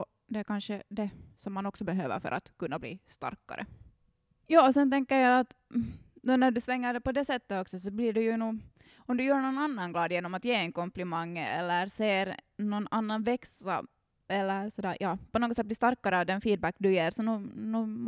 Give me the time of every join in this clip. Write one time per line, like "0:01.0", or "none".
0:04.4